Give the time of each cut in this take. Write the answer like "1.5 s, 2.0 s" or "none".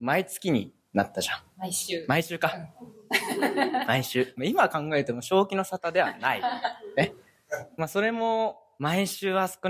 4.3 s